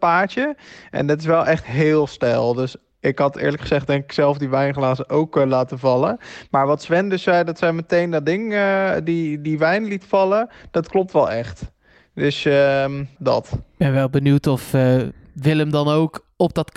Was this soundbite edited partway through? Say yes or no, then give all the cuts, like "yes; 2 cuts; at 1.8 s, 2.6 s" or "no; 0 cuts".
yes; 1 cut; at 13.2 s